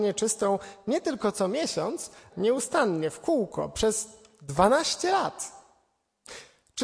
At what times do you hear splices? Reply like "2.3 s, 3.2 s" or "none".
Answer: 2.3 s